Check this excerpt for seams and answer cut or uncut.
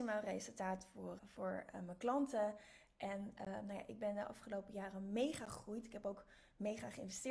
cut